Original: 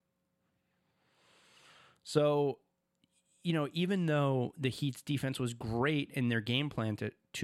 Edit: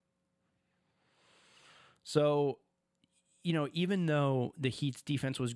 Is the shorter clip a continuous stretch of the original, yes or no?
yes